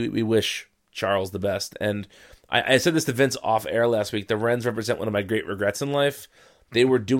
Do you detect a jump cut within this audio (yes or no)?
no